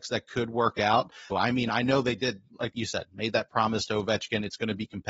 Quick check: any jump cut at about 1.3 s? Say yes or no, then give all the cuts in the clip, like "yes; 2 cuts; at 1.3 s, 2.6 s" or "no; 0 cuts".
yes; 1 cut; at 1.3 s